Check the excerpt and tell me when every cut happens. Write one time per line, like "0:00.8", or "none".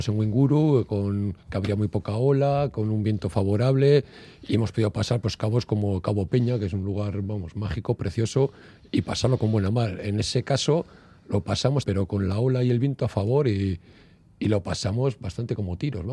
0:11.8